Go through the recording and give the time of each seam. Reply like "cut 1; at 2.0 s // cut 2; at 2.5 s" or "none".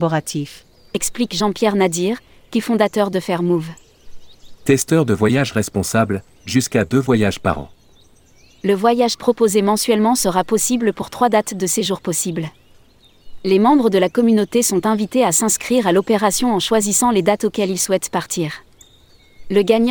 none

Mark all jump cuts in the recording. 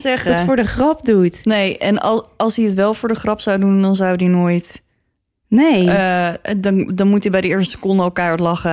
none

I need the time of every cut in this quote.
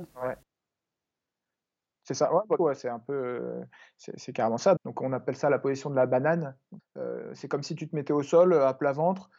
cut 1; at 2.6 s // cut 2; at 4.8 s // cut 3; at 6.8 s

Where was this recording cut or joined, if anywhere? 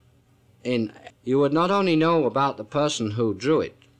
cut 1; at 1.1 s

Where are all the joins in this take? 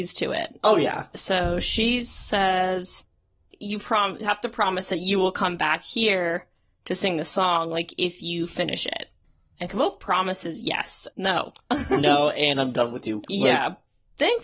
cut 1; at 1.1 s // cut 2; at 11.1 s // cut 3; at 13.3 s

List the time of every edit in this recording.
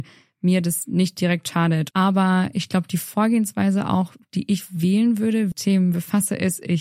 cut 1; at 1.9 s // cut 2; at 5.5 s

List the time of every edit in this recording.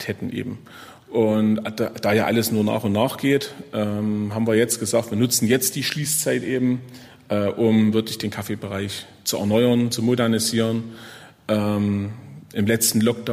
cut 1; at 9.9 s

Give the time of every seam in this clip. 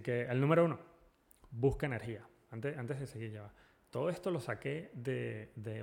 cut 1; at 2.5 s

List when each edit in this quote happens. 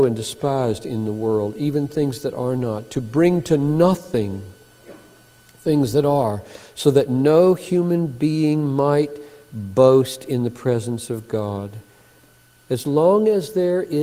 none

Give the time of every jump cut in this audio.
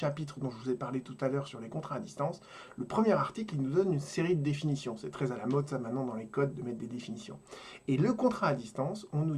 none

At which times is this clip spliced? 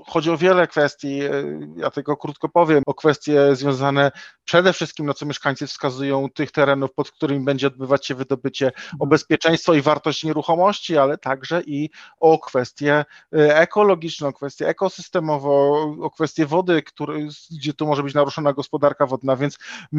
cut 1; at 2.8 s

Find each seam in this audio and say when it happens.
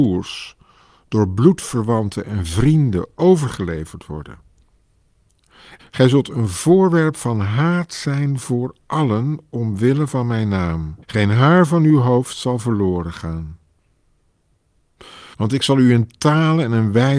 cut 1; at 5.8 s // cut 2; at 11.0 s // cut 3; at 15.3 s

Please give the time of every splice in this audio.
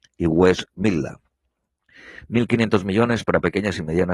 none

